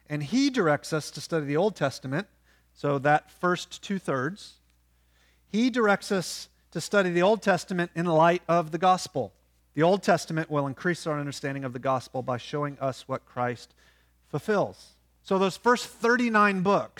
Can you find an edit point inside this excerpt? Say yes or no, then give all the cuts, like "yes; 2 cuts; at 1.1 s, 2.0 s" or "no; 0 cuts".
yes; 2 cuts; at 9.6 s, 15.2 s